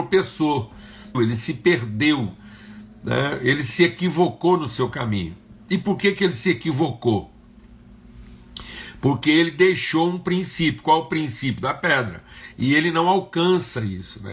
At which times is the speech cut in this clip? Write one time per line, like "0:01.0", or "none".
0:01.1
0:12.5